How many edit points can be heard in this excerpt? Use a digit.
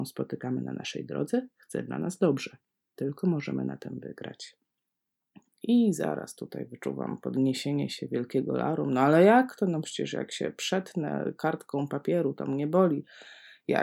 1